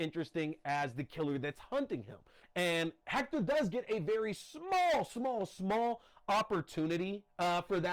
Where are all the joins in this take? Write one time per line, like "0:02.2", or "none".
0:02.4

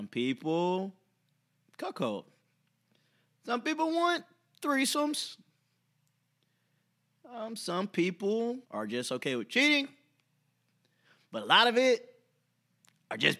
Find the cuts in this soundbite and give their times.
0:08.6

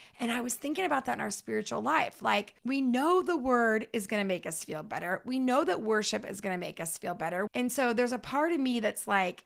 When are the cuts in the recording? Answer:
0:02.6
0:07.5

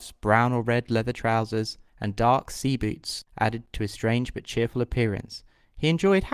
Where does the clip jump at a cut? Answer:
0:01.9

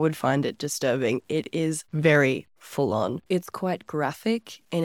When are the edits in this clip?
0:01.9
0:03.3

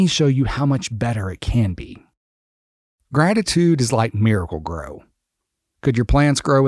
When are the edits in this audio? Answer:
none

